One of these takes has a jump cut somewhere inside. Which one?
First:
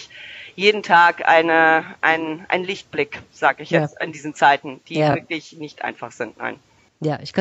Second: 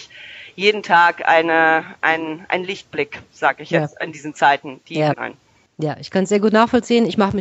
second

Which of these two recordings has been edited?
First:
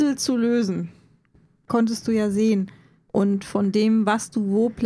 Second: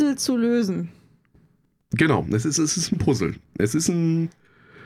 first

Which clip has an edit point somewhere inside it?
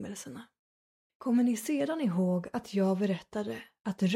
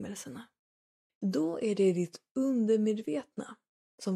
second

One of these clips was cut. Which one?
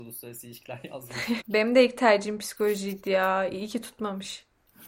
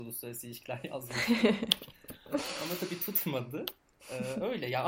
first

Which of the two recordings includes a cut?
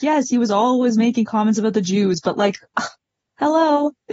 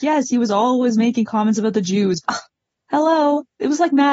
second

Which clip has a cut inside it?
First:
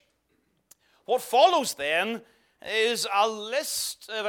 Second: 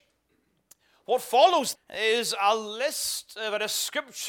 second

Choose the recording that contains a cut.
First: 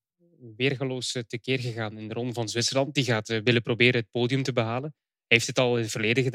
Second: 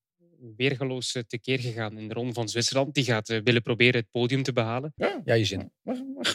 second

